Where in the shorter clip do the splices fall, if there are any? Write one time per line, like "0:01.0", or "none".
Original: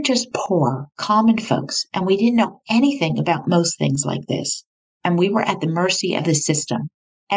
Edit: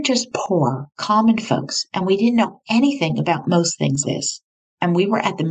0:04.0

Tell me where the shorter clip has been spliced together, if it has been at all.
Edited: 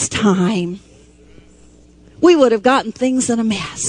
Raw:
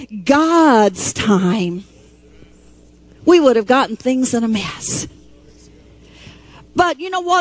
none

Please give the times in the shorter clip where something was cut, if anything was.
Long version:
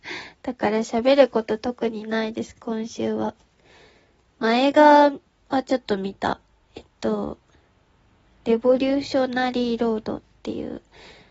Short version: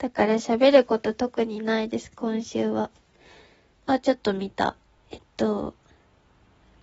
0:03.7

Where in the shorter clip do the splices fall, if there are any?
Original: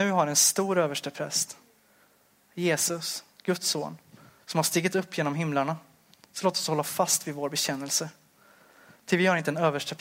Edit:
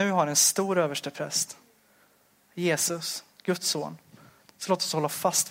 0:04.4

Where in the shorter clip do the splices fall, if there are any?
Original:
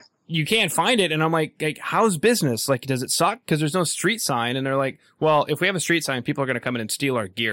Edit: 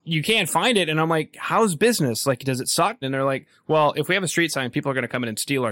0:01.3
0:03.0

